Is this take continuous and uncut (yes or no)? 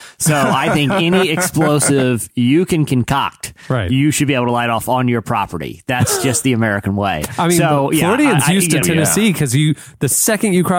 no